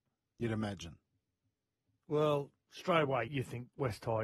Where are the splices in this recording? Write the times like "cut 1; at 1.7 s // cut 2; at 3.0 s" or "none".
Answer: cut 1; at 3.3 s